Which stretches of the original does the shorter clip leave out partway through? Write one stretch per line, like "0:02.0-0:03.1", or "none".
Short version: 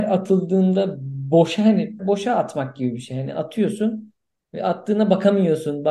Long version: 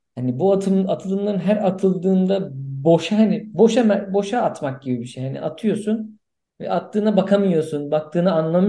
0:03.5-0:04.1